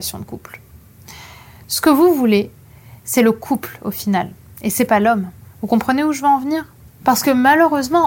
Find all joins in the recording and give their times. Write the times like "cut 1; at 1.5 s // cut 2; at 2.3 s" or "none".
cut 1; at 5.4 s